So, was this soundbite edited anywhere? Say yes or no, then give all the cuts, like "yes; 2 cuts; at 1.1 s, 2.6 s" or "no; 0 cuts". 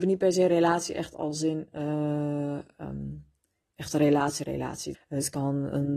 yes; 1 cut; at 4.9 s